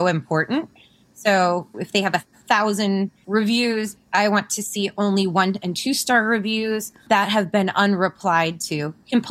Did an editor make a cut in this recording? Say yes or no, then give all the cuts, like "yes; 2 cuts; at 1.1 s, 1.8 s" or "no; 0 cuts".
yes; 1 cut; at 4.0 s